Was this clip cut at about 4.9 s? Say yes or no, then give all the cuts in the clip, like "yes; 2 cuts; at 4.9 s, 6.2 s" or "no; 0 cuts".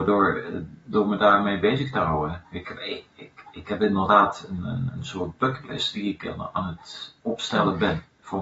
yes; 1 cut; at 4.9 s